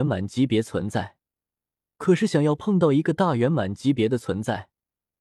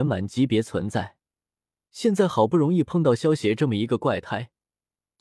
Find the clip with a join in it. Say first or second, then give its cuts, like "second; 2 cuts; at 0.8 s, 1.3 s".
second; 1 cut; at 1.9 s